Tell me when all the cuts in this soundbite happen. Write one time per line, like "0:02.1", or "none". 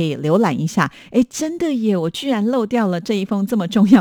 none